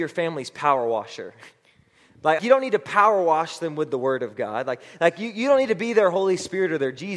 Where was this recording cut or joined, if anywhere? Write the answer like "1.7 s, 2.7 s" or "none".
2.4 s